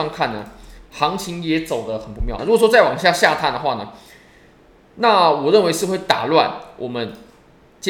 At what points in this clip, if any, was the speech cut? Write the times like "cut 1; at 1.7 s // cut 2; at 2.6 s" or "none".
cut 1; at 2.4 s